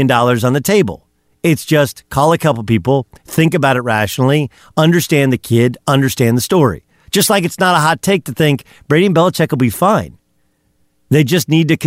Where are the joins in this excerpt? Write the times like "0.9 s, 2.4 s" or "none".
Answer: none